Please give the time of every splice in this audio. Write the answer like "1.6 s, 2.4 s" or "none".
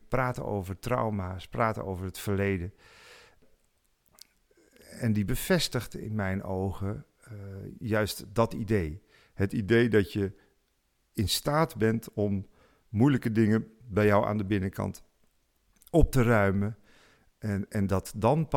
none